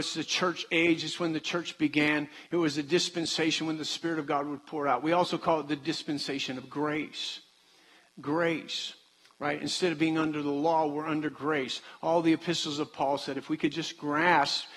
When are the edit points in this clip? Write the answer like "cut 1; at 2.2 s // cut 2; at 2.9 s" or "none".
none